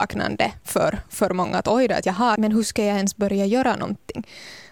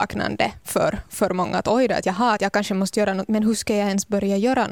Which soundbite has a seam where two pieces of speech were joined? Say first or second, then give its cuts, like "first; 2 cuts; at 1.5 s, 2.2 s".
first; 1 cut; at 2.4 s